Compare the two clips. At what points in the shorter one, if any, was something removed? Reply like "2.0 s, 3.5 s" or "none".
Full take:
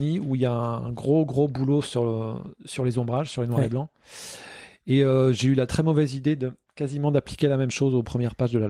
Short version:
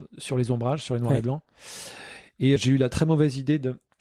2.6 s